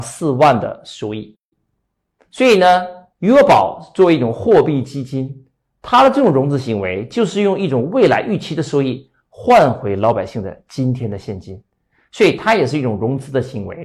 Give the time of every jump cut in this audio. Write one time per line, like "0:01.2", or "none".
none